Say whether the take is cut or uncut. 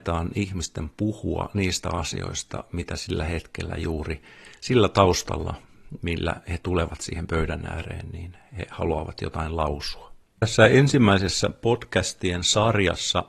cut